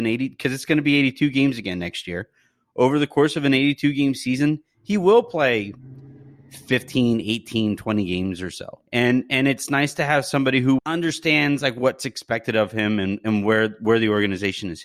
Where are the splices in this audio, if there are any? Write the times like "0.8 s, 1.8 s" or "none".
8.9 s, 10.8 s

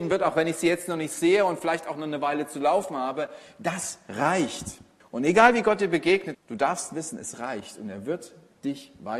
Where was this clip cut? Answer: 5.0 s, 6.3 s

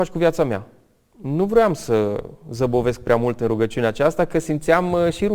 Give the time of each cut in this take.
1.1 s

